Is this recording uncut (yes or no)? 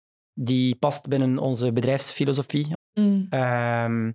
no